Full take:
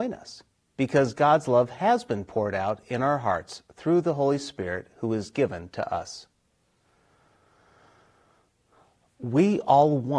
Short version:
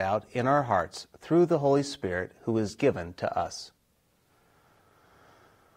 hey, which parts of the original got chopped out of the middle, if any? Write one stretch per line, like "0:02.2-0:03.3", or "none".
none